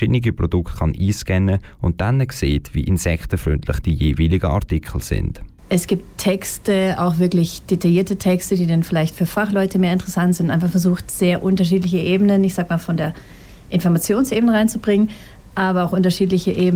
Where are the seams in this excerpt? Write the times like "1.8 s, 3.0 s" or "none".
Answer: 5.6 s